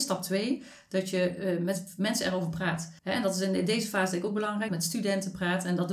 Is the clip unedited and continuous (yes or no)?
no